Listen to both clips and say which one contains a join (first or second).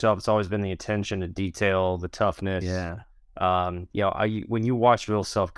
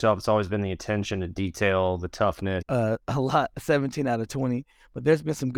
second